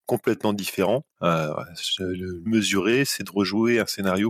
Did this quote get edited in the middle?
yes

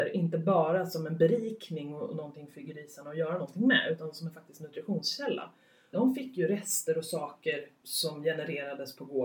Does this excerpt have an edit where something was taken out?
yes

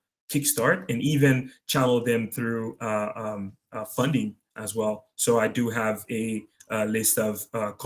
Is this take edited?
no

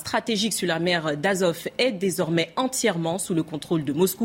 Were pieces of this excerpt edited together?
no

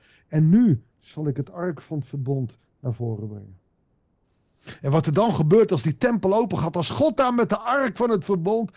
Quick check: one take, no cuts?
yes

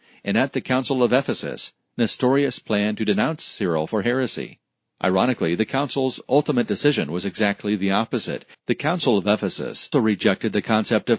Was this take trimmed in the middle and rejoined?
yes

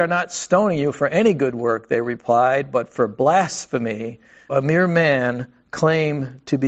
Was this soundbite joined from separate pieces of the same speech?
yes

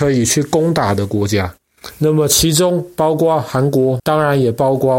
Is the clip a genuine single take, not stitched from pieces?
no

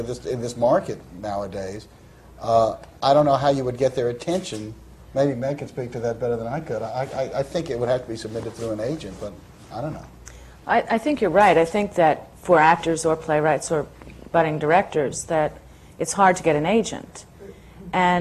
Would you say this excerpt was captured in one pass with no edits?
yes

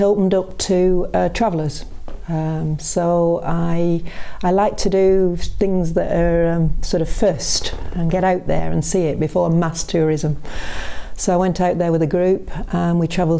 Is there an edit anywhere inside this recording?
no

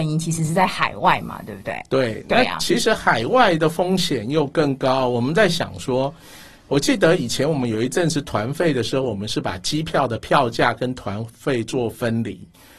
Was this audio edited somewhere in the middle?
no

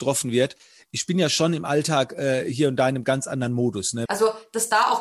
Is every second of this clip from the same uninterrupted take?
no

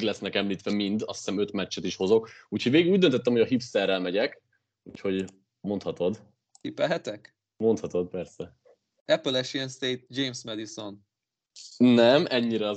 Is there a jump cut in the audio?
no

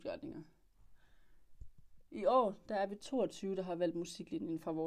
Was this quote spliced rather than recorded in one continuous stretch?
yes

